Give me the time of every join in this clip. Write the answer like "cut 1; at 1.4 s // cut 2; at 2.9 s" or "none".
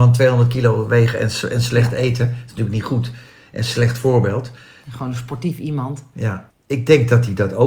cut 1; at 4.8 s // cut 2; at 6.5 s